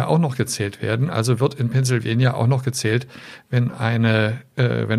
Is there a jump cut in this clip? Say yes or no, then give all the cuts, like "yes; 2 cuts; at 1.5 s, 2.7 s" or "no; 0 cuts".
no; 0 cuts